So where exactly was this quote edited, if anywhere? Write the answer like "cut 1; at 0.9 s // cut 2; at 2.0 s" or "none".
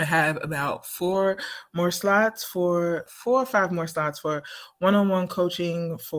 cut 1; at 3.1 s